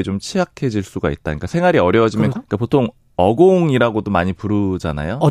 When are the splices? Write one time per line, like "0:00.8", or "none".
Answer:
0:02.4